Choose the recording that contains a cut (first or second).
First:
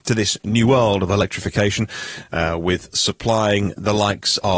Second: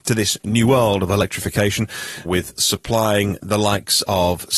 second